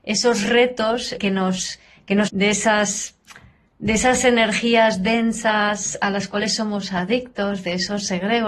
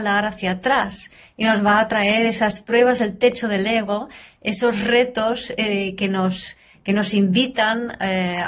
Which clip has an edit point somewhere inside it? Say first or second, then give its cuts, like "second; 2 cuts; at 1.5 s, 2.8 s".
first; 2 cuts; at 1.2 s, 2.3 s